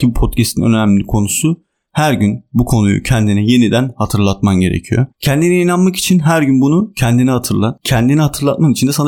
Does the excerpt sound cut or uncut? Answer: cut